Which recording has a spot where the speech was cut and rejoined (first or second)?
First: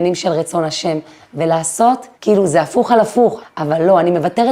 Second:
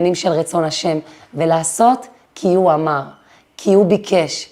first